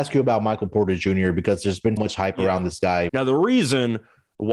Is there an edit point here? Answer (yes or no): yes